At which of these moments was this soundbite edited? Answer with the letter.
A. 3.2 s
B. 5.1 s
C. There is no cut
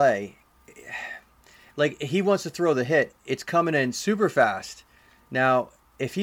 C